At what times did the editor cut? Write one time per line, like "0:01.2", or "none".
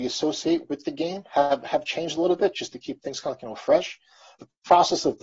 none